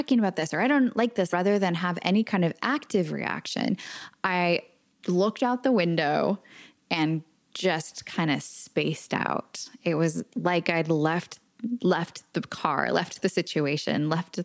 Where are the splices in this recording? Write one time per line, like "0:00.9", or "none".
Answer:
0:01.3